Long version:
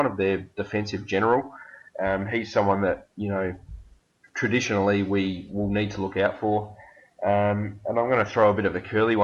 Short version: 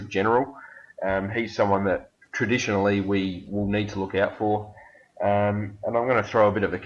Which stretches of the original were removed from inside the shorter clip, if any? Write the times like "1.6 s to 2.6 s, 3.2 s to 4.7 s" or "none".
3.1 s to 4.2 s

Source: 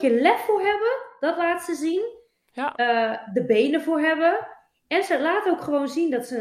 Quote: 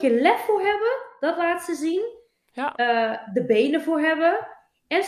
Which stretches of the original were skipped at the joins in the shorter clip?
none

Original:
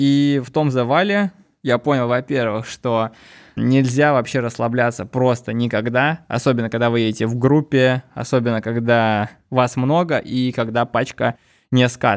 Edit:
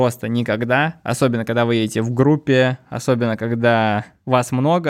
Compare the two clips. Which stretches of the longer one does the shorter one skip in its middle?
none

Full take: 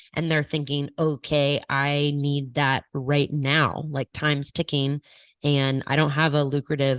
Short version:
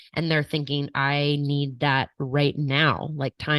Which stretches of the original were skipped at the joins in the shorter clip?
0.9 s to 1.7 s

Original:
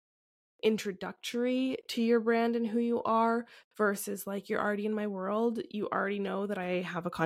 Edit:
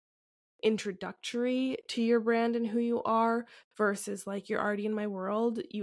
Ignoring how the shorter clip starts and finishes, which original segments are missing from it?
none

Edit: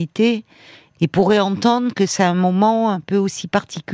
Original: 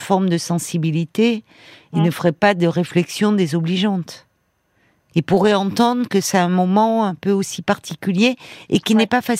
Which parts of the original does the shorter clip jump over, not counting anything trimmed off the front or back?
1.9 s to 5.1 s

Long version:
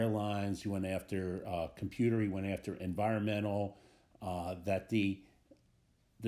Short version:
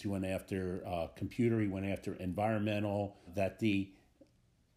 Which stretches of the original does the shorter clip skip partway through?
3.9 s to 4.6 s

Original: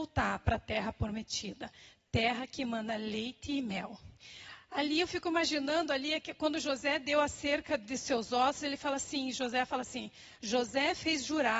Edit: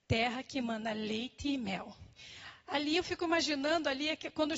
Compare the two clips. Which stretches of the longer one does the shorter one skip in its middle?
none

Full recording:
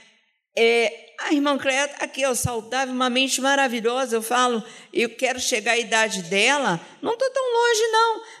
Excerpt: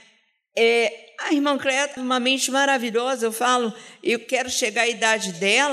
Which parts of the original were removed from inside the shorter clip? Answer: 2.0 s to 2.9 s

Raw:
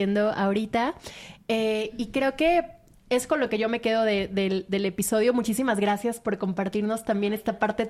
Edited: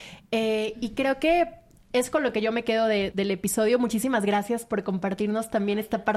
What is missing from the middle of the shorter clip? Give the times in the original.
4.3 s to 4.7 s

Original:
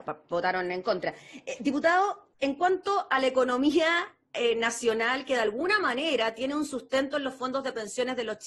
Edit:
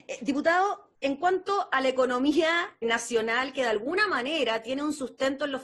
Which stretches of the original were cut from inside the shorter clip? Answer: 4.2 s to 4.5 s

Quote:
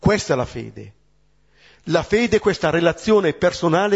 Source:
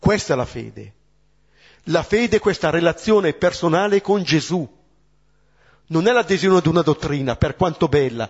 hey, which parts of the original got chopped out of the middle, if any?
none

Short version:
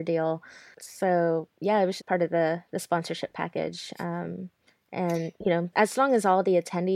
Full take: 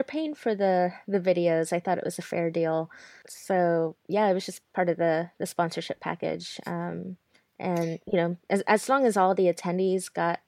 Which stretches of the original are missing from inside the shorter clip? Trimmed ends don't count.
4.5 s to 4.6 s, 8.4 s to 8.6 s

